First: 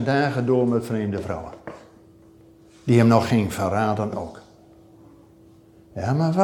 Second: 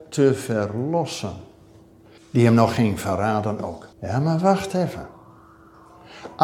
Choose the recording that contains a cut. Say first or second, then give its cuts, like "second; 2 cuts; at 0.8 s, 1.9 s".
second; 2 cuts; at 2.2 s, 3.9 s